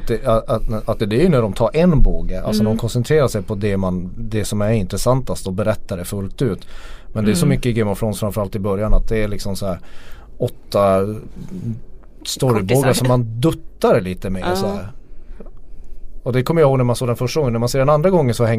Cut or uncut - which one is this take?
cut